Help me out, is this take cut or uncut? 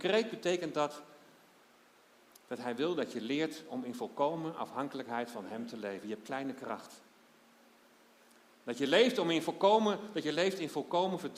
uncut